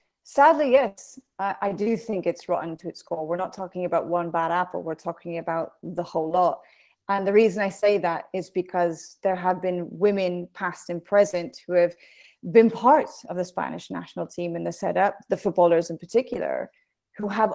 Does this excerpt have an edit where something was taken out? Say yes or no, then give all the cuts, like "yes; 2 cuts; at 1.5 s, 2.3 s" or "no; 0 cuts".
no; 0 cuts